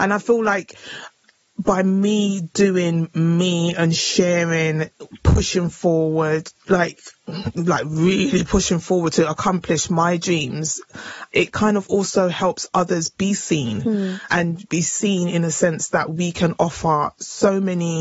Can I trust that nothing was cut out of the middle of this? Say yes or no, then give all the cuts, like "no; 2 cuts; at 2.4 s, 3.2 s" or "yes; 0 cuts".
yes; 0 cuts